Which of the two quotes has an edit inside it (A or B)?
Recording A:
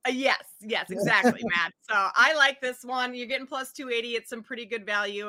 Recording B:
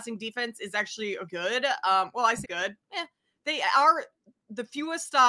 B